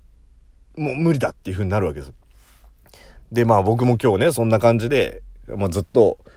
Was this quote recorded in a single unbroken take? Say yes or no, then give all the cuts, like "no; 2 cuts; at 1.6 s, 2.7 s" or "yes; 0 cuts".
yes; 0 cuts